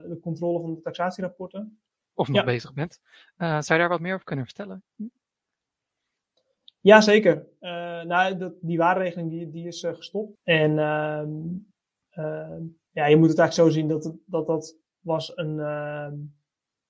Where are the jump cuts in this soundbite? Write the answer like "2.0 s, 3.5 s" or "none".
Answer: 2.0 s, 10.4 s